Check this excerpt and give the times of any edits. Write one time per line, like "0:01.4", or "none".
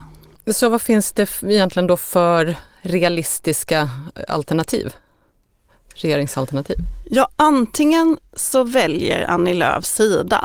none